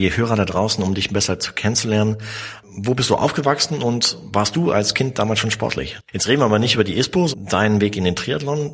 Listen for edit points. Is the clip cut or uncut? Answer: cut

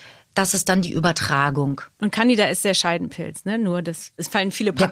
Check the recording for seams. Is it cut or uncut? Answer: uncut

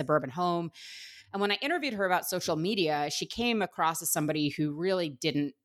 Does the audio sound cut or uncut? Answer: uncut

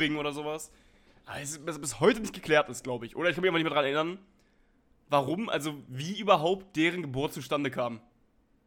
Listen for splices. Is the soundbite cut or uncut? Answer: uncut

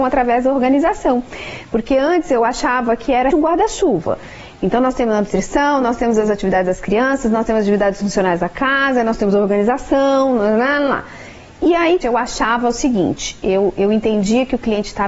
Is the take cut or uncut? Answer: cut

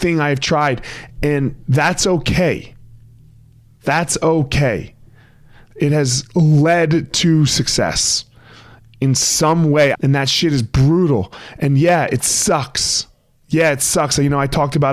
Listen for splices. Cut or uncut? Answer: cut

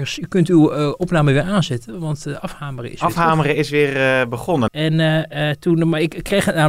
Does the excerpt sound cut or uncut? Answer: cut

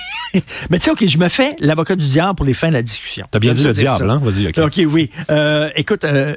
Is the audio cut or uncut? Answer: uncut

